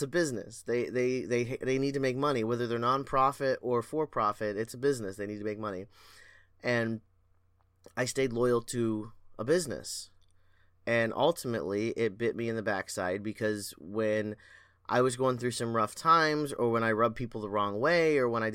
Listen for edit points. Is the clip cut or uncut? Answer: uncut